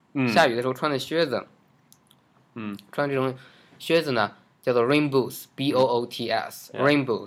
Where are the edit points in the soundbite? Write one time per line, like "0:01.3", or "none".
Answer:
0:02.4